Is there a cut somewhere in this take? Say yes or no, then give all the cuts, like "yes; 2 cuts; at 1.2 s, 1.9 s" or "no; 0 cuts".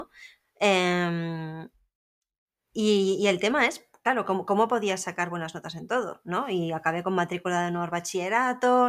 no; 0 cuts